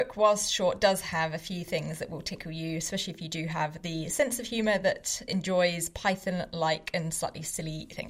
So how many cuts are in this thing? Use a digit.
0